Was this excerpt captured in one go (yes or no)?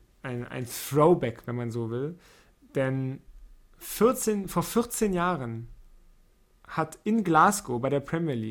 yes